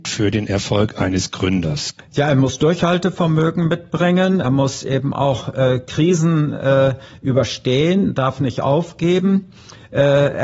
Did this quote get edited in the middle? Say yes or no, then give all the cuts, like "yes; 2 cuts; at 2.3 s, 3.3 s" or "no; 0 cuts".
yes; 2 cuts; at 2.0 s, 4.4 s